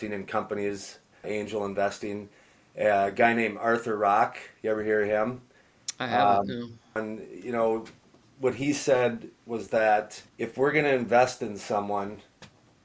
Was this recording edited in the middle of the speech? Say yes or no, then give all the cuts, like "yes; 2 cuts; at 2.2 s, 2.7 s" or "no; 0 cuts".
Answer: yes; 3 cuts; at 1.2 s, 7.0 s, 10.3 s